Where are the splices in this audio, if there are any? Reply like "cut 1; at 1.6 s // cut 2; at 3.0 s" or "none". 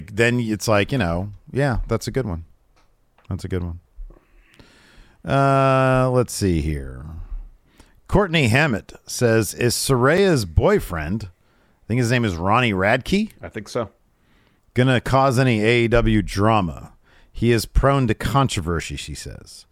none